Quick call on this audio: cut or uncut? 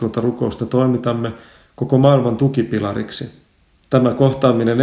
cut